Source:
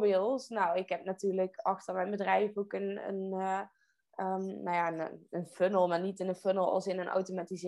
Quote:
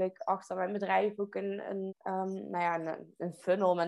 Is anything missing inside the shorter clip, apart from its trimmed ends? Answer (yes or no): yes